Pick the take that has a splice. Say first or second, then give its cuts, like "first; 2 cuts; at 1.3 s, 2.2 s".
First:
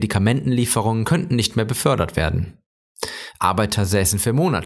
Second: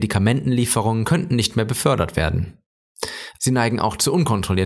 second; 1 cut; at 3.4 s